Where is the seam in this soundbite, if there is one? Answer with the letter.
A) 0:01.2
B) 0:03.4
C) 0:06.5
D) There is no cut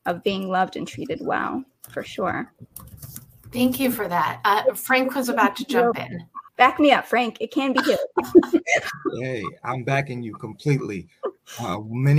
C